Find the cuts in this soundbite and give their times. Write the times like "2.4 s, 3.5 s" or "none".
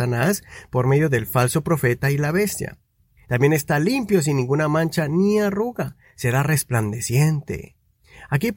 3.2 s